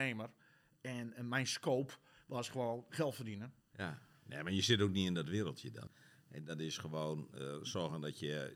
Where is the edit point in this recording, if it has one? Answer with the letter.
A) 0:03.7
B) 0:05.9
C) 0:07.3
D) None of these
B